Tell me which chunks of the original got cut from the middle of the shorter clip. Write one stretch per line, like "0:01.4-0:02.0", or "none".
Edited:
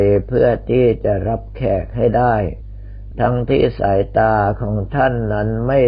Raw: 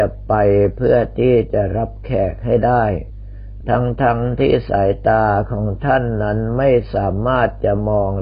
0:04.0-0:04.4